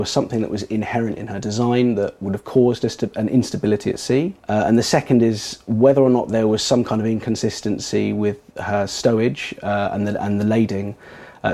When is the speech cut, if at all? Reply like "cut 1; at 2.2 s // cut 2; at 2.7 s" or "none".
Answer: cut 1; at 4.4 s